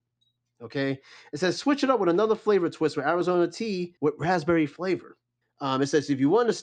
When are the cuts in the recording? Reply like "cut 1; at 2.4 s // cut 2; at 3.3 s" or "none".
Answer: cut 1; at 4.0 s // cut 2; at 5.4 s